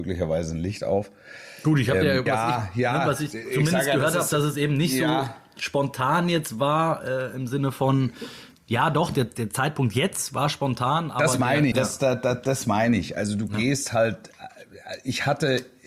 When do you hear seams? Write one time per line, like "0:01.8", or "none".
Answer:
0:02.3
0:11.7